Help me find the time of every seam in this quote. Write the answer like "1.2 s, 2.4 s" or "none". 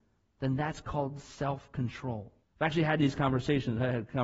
2.4 s